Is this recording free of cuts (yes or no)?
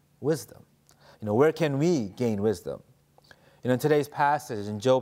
yes